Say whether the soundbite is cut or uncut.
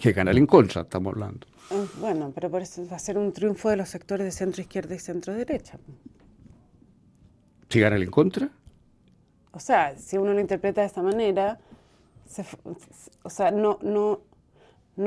uncut